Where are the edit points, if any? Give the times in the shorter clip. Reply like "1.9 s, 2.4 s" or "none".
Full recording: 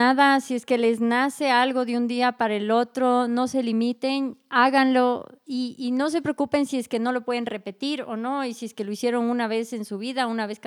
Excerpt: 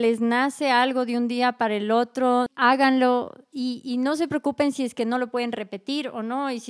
2.5 s